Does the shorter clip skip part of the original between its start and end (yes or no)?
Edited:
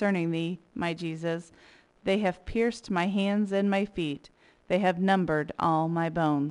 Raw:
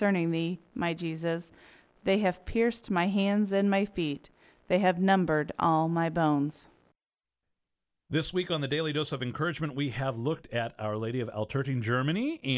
no